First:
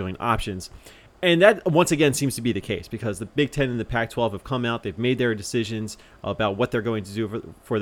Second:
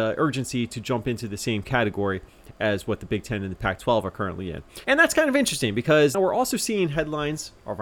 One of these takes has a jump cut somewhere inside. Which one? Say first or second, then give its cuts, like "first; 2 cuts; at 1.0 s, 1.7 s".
second; 2 cuts; at 4.8 s, 6.1 s